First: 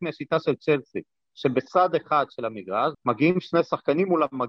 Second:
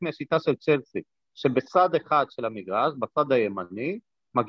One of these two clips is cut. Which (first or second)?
first